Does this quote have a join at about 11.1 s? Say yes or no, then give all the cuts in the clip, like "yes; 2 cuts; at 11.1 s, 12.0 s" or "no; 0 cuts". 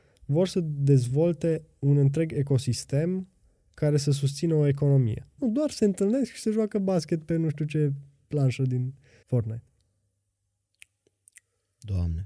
no; 2 cuts; at 5.4 s, 9.2 s